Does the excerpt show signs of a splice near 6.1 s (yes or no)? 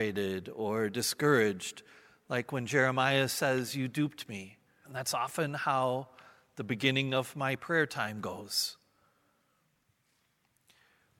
no